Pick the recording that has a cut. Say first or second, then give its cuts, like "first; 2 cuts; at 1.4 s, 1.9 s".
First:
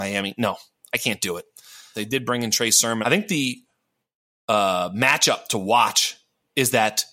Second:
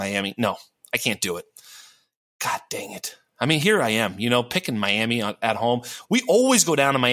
first; 2 cuts; at 1.9 s, 3.0 s